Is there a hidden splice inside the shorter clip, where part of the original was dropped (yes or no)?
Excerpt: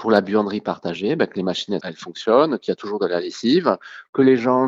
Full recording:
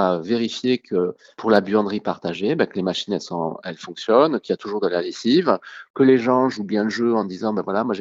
yes